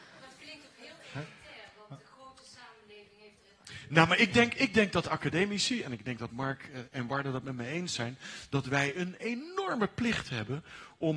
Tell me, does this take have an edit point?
no; 0 cuts

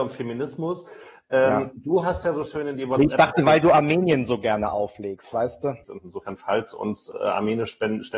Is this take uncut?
no; 2 cuts; at 5.8 s, 7.1 s

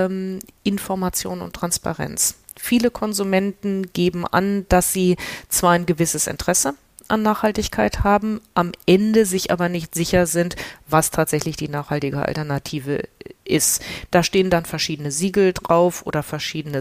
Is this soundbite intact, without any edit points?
yes; 0 cuts

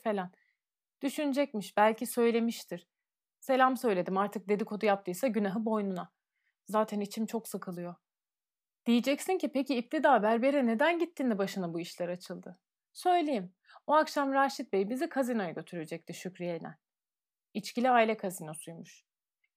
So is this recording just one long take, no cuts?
yes; 0 cuts

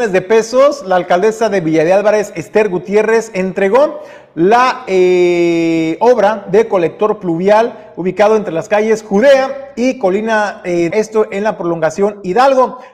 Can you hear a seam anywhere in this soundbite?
yes; 1 cut; at 10.9 s

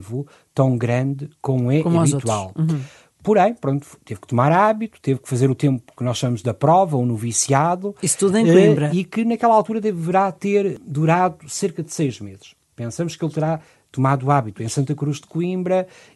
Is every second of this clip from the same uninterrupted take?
yes; 0 cuts

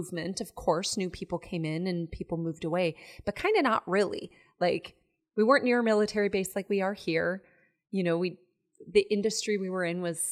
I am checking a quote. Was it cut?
no; 0 cuts

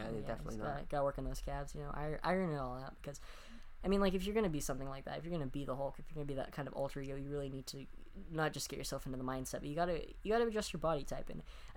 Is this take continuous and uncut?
yes; 0 cuts

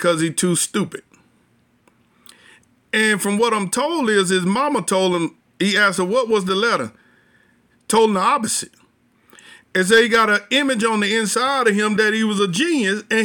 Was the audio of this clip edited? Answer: yes; 1 cut; at 7.7 s

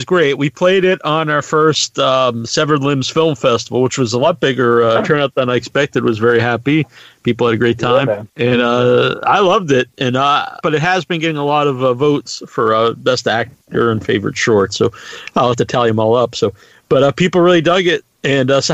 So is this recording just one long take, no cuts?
no; 2 cuts; at 8.3 s, 10.6 s

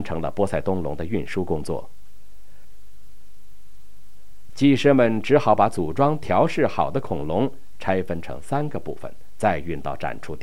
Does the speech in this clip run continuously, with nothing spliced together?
no; 1 cut; at 4.5 s

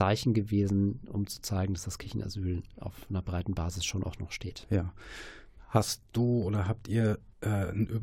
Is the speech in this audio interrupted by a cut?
no; 0 cuts

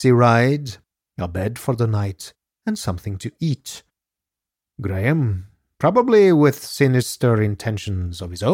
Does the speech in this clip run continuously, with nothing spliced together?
yes; 0 cuts

